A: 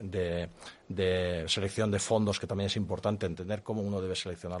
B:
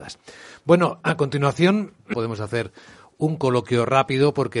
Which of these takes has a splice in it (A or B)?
B